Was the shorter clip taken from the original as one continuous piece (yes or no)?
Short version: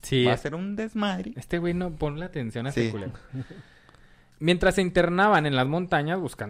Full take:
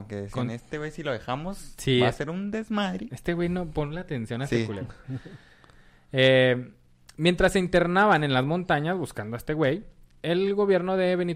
no